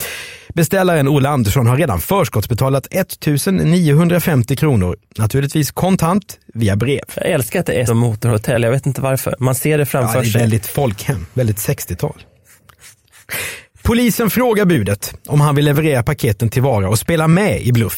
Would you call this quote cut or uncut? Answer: cut